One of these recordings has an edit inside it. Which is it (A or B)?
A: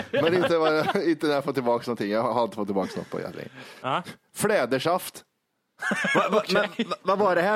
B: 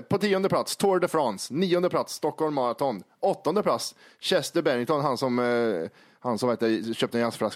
A